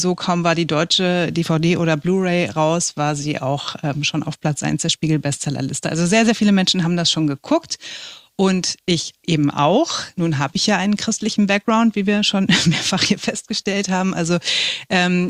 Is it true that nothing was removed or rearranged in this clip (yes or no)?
yes